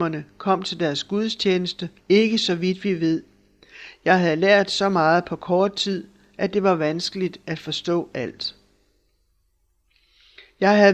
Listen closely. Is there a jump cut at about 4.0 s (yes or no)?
no